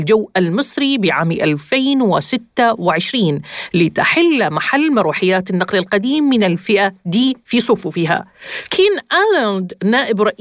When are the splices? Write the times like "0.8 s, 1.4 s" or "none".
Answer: none